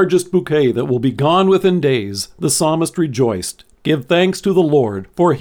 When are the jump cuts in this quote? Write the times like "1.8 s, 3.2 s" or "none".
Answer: none